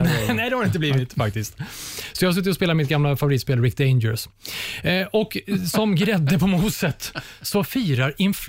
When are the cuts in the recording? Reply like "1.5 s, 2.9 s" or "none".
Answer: 5.4 s

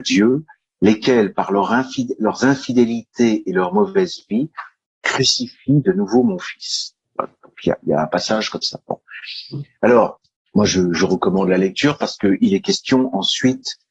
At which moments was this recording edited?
none

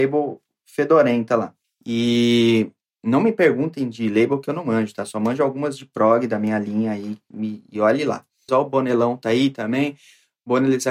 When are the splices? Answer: 1.6 s, 8.5 s

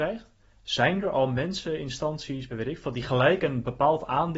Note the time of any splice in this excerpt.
2.5 s

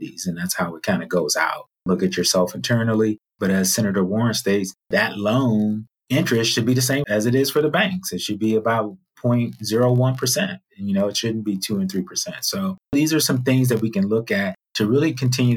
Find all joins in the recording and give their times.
3.3 s

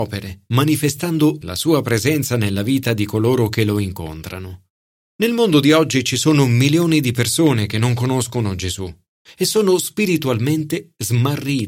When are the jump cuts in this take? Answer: 1.4 s, 5.0 s

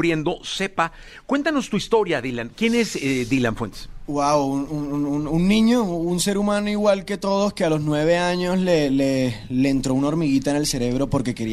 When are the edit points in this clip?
none

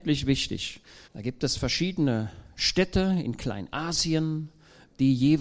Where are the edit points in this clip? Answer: 1.1 s

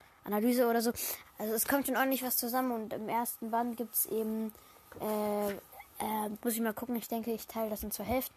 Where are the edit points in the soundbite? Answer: 1.2 s, 6.4 s

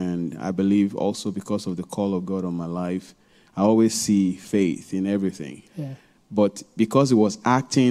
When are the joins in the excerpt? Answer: 5.7 s

